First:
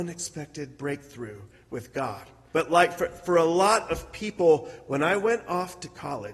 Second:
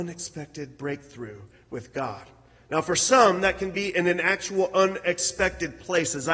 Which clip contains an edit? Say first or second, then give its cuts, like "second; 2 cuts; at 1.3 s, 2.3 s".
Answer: first; 1 cut; at 2.5 s